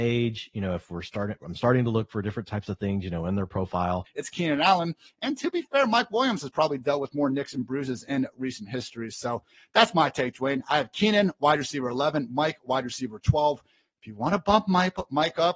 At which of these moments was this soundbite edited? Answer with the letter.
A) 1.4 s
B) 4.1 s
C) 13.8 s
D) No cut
B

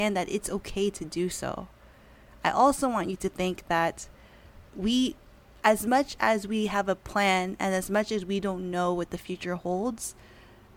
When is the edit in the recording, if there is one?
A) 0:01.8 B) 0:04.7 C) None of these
B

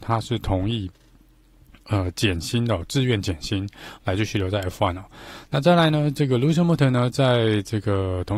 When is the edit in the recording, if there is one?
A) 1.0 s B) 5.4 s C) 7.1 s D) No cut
B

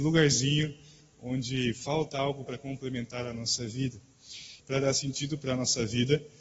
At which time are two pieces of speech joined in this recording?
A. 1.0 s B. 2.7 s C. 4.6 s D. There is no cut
C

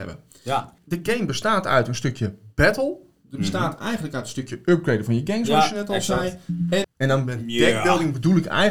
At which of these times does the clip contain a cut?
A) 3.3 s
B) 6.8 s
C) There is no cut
B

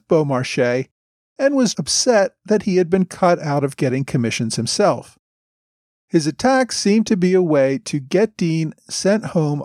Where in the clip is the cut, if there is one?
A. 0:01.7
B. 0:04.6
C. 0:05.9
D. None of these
A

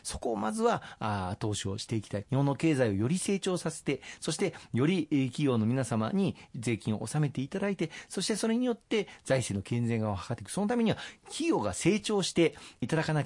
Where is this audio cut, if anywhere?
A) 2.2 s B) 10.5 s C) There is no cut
A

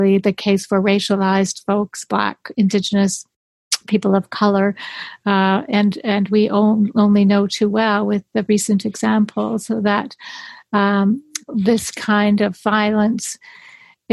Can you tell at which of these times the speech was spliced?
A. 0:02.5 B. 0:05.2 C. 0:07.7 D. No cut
D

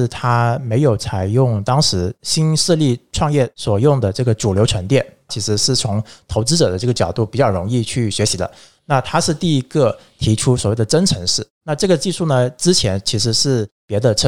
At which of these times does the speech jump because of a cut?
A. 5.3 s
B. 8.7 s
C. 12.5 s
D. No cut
A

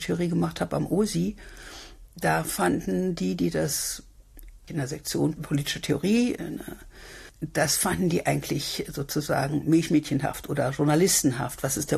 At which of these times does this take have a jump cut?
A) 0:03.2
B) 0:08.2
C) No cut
C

